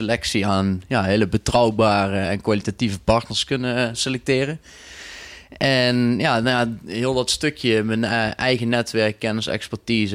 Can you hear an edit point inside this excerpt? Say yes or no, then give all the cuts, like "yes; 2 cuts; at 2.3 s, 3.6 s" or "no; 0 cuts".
no; 0 cuts